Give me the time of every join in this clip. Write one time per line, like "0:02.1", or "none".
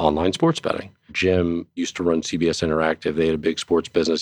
0:01.1